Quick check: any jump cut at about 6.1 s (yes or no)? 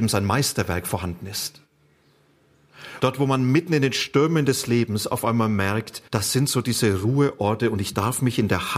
yes